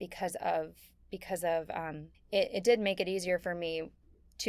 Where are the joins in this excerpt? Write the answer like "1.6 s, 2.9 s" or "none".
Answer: 2.1 s